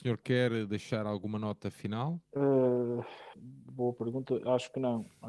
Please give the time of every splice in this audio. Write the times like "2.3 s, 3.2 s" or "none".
2.2 s, 3.3 s